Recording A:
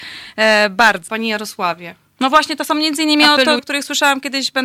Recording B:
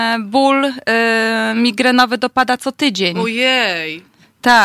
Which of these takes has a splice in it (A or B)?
A